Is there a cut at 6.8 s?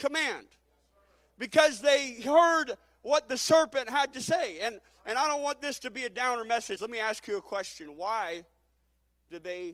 yes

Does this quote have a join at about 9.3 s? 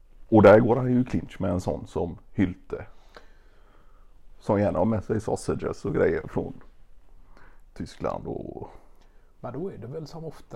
no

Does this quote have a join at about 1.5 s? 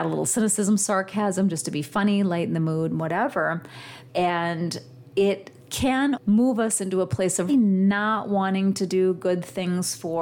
no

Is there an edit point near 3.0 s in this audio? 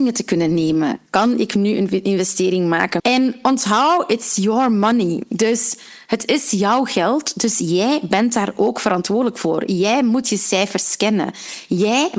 yes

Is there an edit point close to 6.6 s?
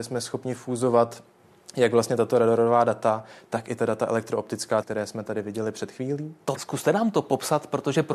yes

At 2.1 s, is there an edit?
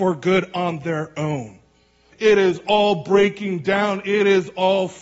yes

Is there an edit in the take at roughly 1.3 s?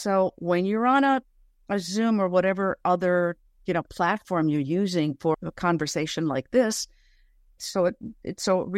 no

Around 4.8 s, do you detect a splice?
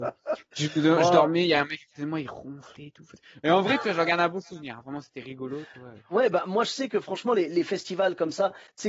no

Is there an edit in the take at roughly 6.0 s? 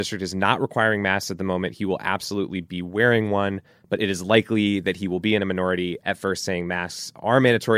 yes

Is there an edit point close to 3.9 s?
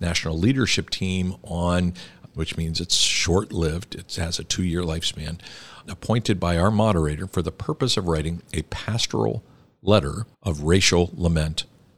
no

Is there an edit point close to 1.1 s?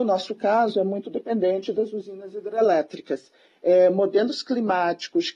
no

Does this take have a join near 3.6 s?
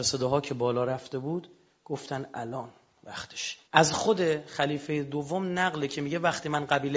yes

